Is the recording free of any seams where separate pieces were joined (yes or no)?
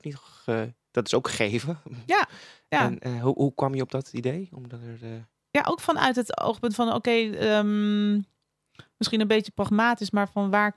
yes